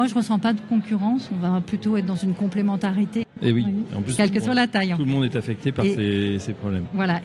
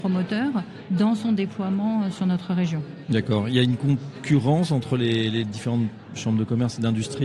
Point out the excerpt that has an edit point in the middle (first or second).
first